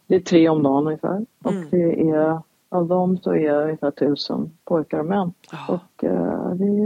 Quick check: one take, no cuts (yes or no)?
no